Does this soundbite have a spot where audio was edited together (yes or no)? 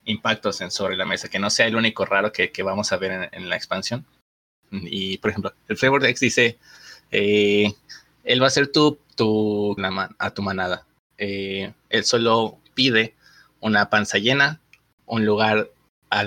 yes